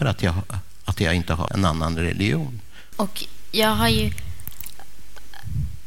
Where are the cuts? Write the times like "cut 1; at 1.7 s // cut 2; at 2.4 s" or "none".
cut 1; at 1.5 s // cut 2; at 2.9 s